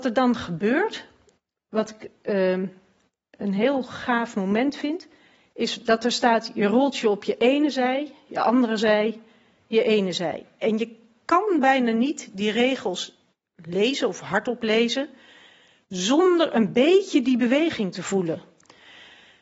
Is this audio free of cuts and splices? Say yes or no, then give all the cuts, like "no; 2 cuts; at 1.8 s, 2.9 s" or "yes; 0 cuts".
yes; 0 cuts